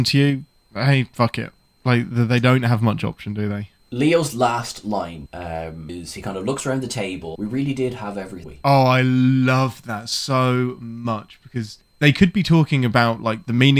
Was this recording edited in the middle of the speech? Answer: no; 0 cuts

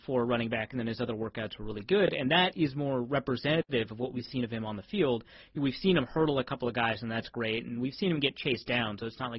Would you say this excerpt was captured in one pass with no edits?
yes; 0 cuts

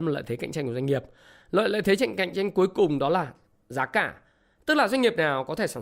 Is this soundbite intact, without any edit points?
yes; 0 cuts

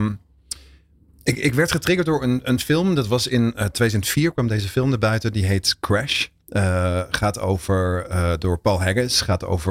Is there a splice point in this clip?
no; 0 cuts

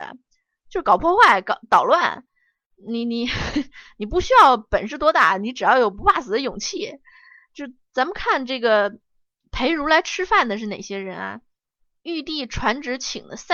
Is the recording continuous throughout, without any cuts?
yes; 0 cuts

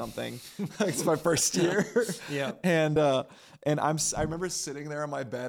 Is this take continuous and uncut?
yes; 0 cuts

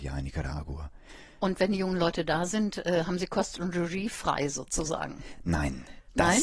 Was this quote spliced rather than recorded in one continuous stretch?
no; 0 cuts

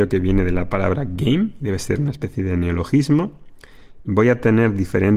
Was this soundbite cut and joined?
yes; 1 cut; at 4.0 s

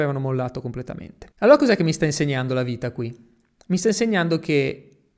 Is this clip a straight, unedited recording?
no; 1 cut; at 1.3 s

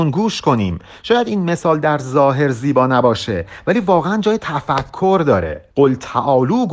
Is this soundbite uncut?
no; 1 cut; at 5.7 s

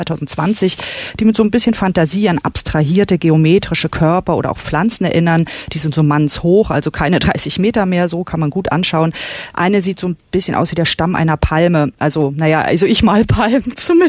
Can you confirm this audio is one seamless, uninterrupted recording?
yes; 0 cuts

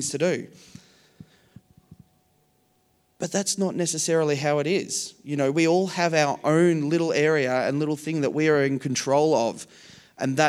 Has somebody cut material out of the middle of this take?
no; 0 cuts

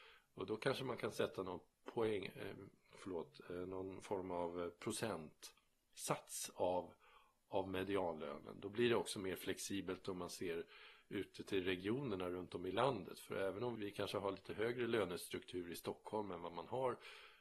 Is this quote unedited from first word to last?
no; 1 cut; at 13.8 s

